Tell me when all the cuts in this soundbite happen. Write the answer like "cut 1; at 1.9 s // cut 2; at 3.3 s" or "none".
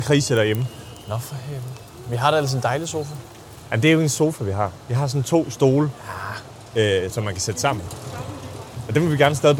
cut 1; at 7.1 s